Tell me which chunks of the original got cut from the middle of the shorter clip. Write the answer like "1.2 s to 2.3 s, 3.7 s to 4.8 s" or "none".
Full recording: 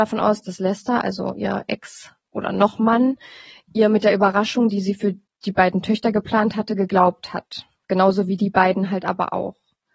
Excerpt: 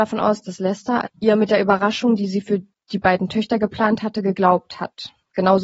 1.0 s to 3.6 s